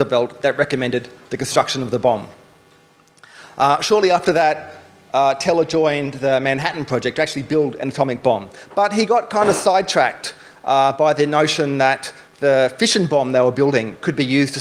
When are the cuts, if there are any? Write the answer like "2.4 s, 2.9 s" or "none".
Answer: none